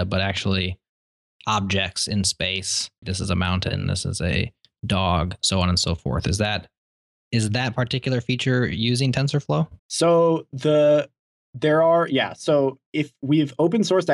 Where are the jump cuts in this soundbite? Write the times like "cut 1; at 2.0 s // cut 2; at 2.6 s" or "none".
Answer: cut 1; at 3.0 s // cut 2; at 9.8 s